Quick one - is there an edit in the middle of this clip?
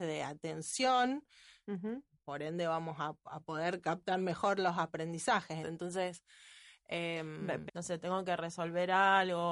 yes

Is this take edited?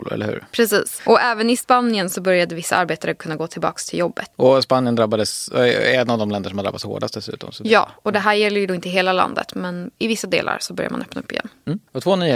yes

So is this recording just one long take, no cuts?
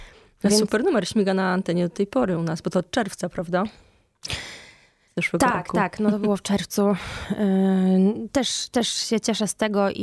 yes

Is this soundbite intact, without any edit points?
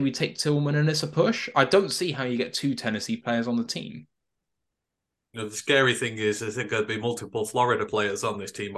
yes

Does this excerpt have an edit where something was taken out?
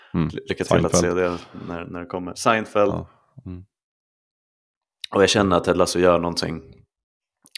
no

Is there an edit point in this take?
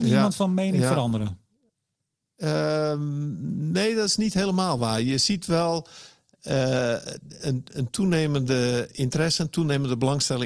no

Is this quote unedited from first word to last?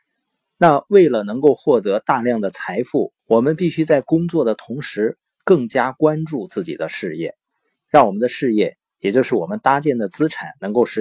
no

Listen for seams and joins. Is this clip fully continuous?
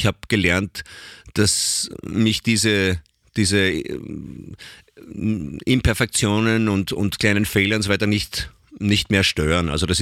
yes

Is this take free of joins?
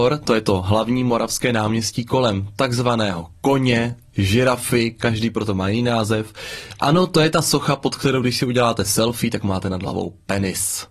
yes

